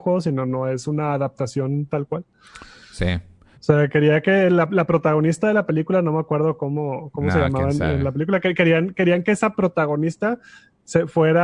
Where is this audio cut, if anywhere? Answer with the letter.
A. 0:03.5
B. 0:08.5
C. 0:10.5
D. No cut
A